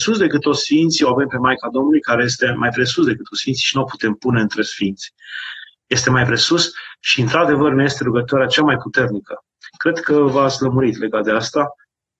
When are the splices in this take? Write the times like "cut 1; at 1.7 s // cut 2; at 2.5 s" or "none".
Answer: none